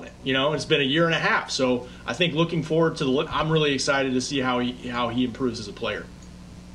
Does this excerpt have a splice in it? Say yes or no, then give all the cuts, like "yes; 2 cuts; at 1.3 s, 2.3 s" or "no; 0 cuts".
yes; 1 cut; at 3.3 s